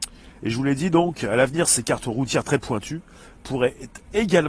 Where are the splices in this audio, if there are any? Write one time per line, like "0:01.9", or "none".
none